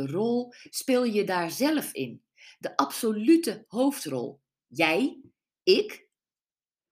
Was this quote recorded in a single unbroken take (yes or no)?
yes